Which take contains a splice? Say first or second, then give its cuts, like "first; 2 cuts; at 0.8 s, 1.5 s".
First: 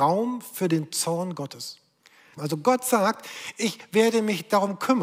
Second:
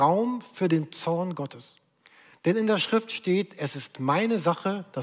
first; 1 cut; at 2.4 s